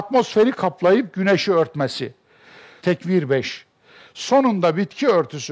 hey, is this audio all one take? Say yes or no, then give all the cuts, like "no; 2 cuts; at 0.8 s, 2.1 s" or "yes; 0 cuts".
no; 1 cut; at 2.8 s